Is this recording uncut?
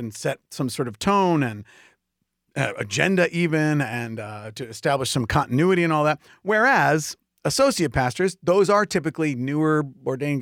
yes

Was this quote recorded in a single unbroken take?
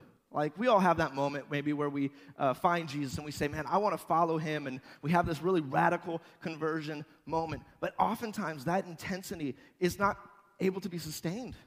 yes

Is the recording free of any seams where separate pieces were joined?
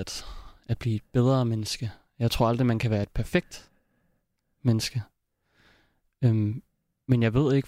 yes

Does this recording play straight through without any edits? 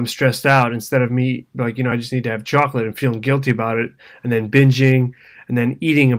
yes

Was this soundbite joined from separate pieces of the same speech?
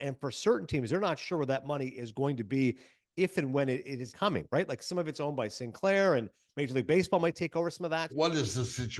yes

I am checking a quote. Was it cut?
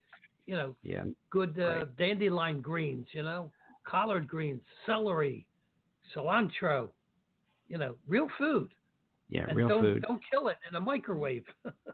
no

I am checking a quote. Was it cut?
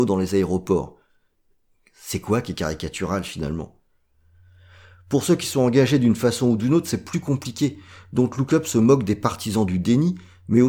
no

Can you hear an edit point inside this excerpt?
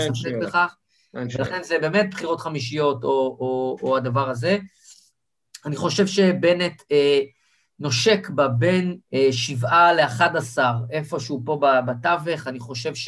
yes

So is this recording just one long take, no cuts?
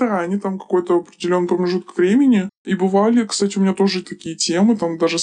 yes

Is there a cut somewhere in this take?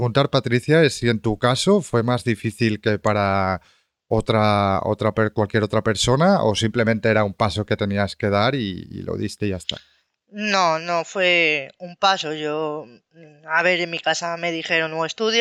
no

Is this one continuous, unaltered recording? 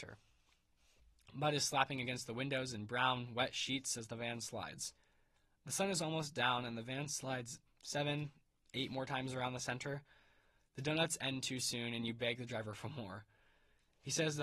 yes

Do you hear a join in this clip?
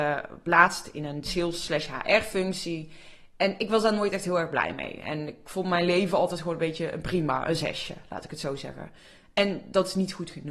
no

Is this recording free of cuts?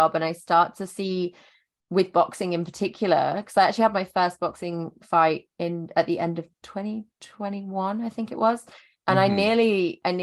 yes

